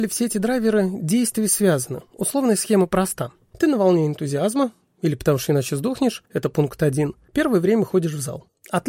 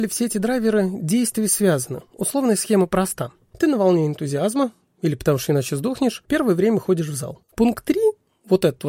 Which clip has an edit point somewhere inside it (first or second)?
second